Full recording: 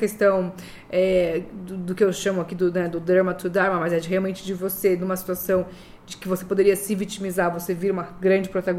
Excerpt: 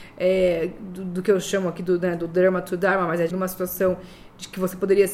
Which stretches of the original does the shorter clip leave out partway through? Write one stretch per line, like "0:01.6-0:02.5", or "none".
0:04.0-0:05.0